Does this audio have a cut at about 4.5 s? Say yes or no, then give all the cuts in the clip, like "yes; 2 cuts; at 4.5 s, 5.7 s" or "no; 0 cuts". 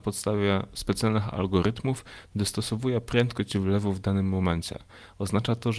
no; 0 cuts